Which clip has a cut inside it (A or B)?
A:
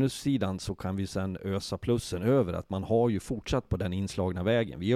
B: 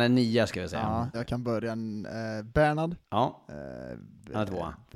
B